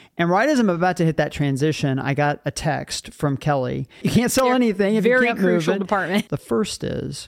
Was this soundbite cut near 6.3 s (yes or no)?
yes